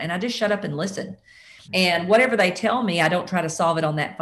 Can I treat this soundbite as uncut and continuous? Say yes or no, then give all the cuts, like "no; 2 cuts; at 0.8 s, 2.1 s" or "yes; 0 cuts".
no; 1 cut; at 1.6 s